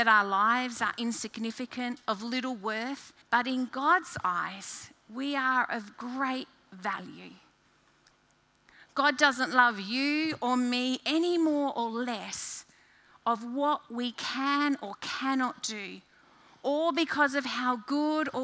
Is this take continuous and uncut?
no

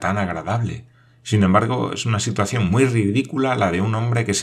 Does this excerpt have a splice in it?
no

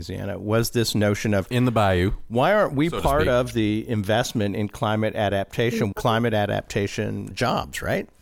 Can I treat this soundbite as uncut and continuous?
no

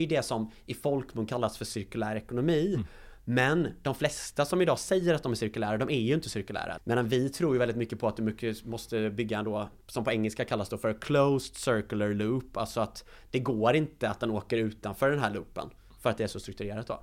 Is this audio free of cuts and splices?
no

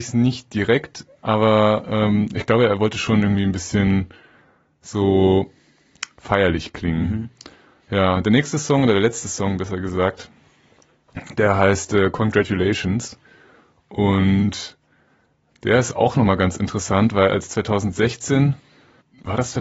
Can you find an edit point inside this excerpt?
no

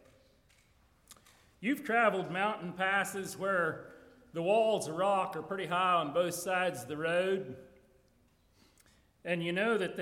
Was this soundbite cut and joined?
yes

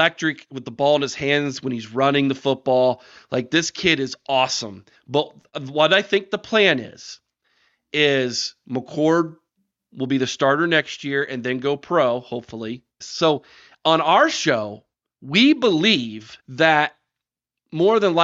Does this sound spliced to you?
yes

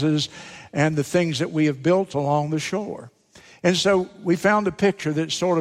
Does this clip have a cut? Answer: no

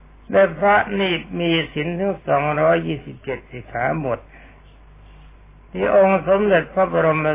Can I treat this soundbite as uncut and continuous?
yes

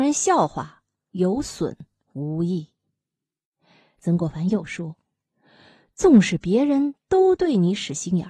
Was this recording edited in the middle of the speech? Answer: no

